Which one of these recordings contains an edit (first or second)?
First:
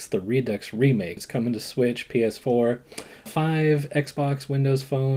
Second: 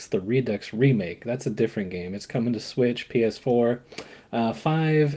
first